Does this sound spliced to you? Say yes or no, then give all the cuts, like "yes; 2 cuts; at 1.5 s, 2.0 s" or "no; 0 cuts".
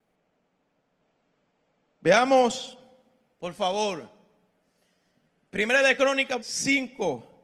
yes; 2 cuts; at 3.3 s, 6.4 s